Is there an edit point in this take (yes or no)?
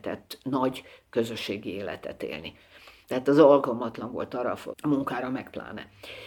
yes